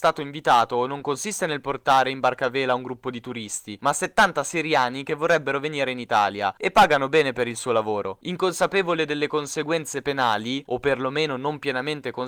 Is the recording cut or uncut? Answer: uncut